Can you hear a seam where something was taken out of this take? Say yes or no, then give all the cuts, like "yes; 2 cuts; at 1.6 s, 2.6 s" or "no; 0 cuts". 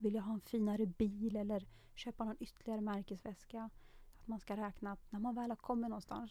yes; 1 cut; at 4.1 s